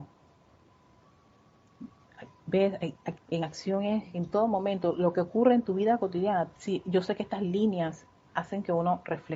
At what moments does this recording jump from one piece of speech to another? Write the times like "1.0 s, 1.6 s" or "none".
3.2 s, 6.6 s